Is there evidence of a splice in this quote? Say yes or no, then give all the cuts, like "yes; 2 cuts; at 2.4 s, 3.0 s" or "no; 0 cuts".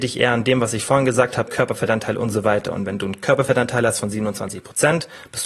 yes; 1 cut; at 1.5 s